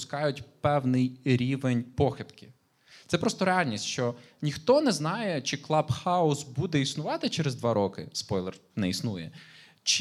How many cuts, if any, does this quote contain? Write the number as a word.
zero